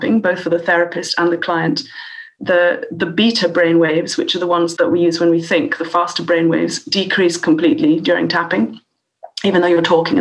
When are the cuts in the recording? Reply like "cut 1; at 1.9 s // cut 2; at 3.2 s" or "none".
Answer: cut 1; at 2.4 s // cut 2; at 4.8 s